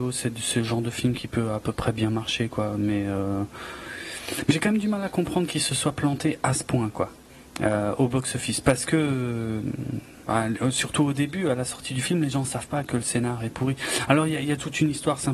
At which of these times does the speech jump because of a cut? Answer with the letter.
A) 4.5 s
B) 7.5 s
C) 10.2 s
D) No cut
A